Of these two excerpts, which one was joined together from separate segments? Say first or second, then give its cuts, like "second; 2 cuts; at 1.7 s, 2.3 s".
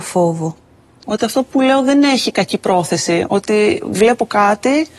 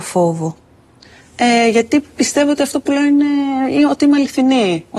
first; 1 cut; at 1.0 s